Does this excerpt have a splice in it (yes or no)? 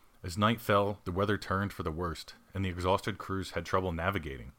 no